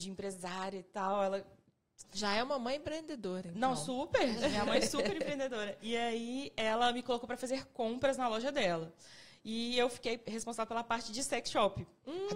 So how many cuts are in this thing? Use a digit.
1